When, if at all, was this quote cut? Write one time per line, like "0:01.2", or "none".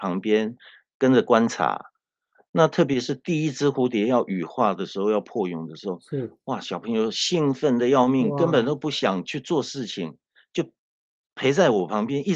none